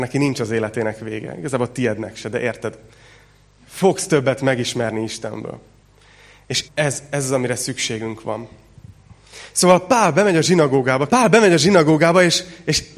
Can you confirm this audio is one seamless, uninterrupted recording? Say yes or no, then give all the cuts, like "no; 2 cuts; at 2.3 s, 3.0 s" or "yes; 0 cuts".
no; 2 cuts; at 6.7 s, 11.1 s